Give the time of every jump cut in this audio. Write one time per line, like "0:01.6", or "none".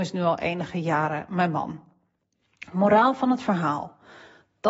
none